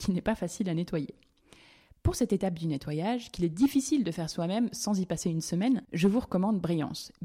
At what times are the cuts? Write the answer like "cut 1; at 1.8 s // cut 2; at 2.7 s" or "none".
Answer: none